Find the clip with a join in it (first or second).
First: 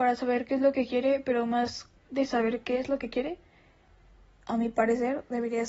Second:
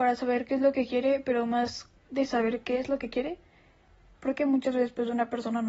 second